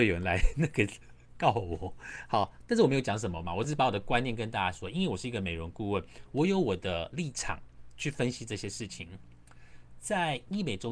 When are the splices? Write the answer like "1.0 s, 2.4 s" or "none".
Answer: none